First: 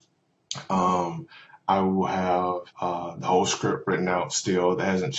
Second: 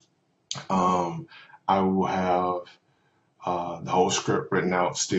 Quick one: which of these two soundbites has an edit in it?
first; 1 cut; at 2.7 s

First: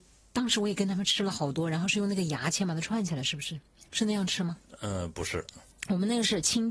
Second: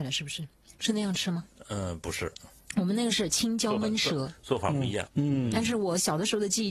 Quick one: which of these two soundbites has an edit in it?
second; 1 cut; at 5.1 s

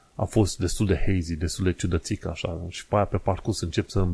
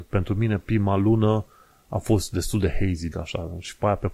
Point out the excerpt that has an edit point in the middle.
second; 1 cut; at 3.1 s

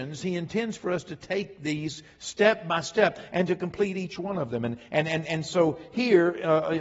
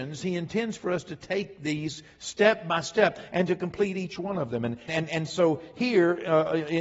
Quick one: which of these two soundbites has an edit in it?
second; 1 cut; at 4.9 s

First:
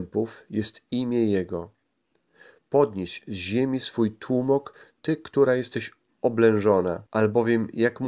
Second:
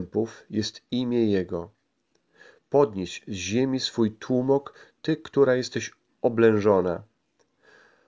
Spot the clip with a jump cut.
first; 1 cut; at 7.1 s

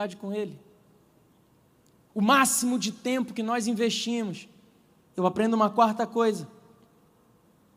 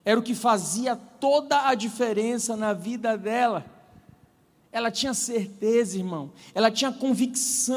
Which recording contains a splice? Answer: first; 1 cut; at 5.0 s

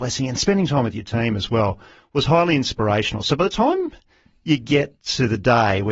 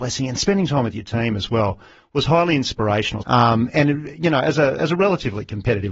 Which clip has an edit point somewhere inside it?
second; 1 cut; at 3.2 s

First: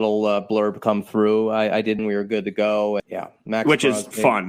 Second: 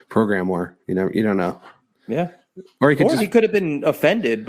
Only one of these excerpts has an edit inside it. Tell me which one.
first; 2 cuts; at 2.0 s, 3.0 s

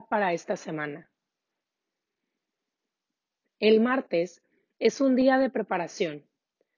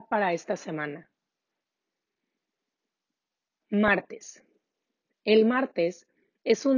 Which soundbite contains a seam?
first; 1 cut; at 3.4 s

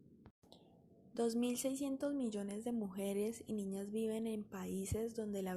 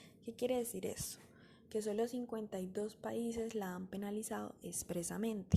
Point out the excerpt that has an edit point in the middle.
first; 1 cut; at 1.1 s

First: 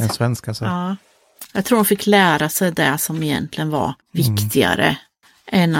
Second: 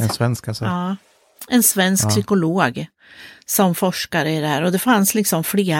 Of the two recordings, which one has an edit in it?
first; 2 cuts; at 1.5 s, 4.0 s

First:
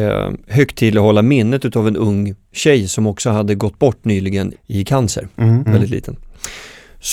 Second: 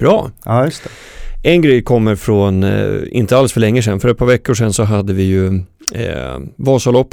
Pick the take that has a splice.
first; 2 cuts; at 4.5 s, 5.7 s

